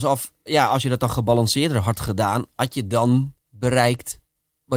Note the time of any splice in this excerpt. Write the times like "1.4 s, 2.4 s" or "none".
3.4 s